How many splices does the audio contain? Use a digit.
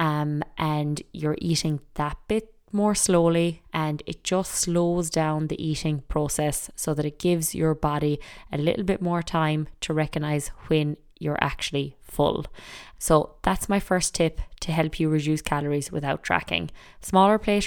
2